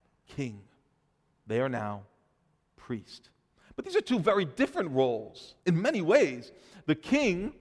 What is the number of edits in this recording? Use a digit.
1